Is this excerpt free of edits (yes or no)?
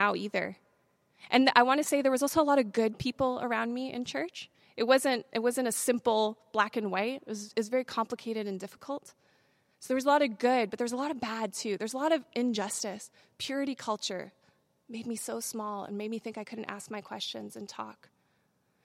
yes